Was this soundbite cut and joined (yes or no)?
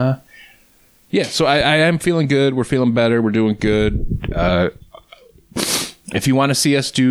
no